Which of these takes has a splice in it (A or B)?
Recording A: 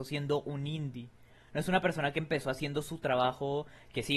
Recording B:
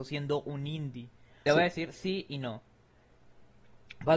B